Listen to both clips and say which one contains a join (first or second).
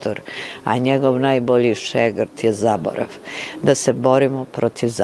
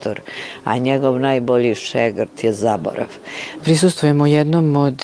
second